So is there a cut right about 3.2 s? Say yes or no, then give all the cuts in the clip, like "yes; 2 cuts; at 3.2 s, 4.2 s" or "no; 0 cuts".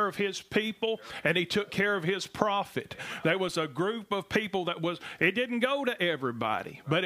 yes; 1 cut; at 3.2 s